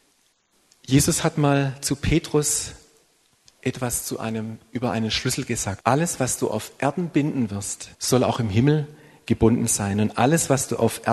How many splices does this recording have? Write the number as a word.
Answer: two